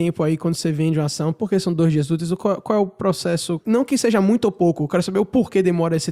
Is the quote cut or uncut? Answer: cut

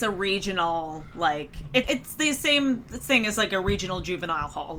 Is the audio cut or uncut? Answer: cut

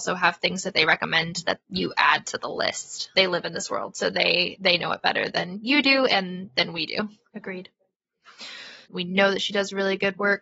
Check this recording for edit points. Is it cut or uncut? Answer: cut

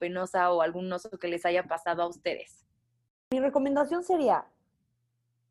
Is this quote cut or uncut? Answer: uncut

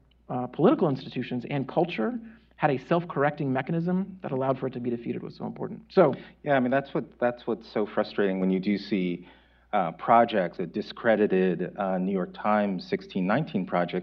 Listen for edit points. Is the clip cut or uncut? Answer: cut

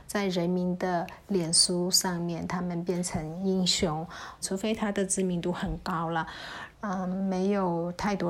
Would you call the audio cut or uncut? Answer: cut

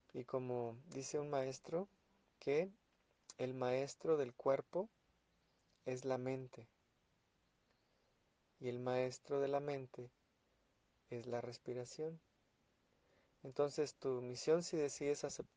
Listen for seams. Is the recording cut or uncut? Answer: cut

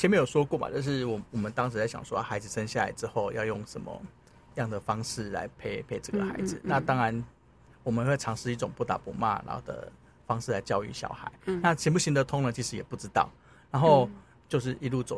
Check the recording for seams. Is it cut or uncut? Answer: uncut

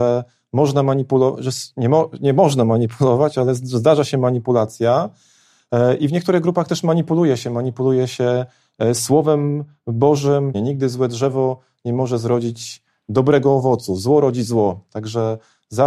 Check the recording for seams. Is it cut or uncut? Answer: cut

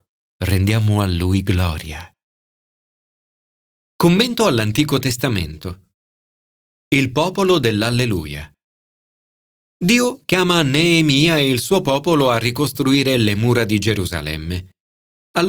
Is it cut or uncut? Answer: uncut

